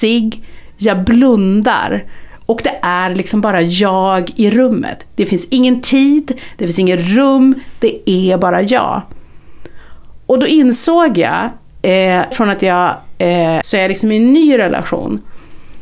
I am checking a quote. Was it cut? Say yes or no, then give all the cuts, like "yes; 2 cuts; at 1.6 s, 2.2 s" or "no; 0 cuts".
yes; 2 cuts; at 12.3 s, 13.6 s